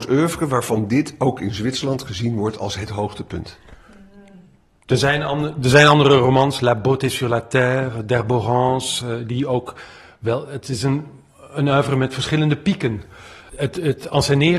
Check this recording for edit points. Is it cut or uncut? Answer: uncut